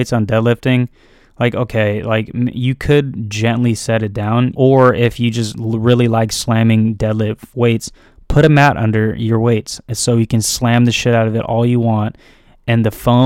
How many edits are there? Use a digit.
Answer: 1